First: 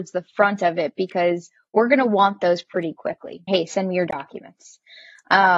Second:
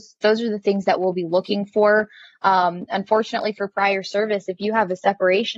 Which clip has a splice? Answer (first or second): first